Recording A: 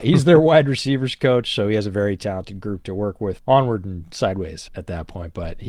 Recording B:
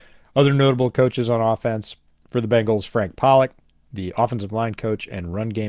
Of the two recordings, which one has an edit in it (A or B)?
A